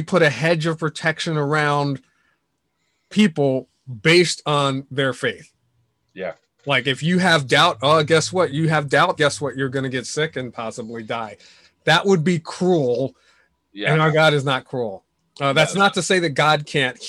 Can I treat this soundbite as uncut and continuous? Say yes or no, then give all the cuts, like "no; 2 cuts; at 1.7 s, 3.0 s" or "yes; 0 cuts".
no; 1 cut; at 9.2 s